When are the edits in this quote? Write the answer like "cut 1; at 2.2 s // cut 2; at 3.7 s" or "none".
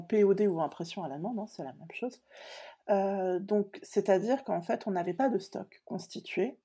none